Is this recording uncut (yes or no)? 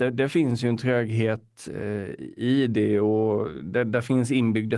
yes